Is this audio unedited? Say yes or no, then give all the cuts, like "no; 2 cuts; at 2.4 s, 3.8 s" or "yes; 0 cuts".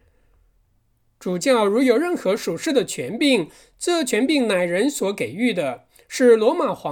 yes; 0 cuts